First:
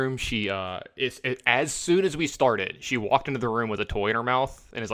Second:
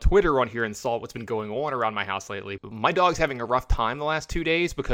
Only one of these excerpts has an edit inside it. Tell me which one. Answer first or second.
second